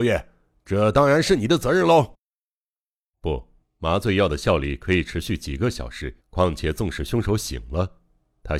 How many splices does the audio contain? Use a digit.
2